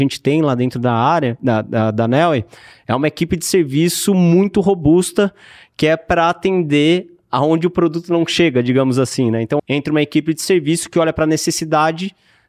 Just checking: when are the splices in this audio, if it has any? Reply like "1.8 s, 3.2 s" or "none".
9.6 s